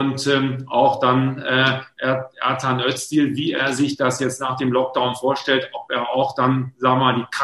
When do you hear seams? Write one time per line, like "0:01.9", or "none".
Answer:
none